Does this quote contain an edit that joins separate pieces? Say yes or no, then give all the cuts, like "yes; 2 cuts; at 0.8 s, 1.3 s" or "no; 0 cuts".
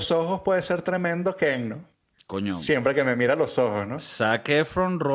no; 0 cuts